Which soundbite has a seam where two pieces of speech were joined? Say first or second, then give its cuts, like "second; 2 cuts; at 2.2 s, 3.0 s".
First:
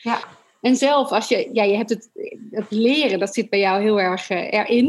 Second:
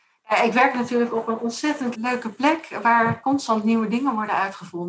second; 1 cut; at 1.9 s